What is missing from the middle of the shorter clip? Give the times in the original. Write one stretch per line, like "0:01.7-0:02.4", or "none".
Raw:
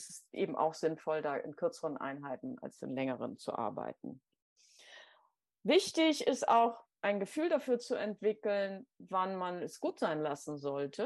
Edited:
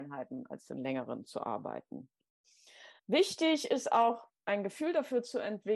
0:05.1-0:05.5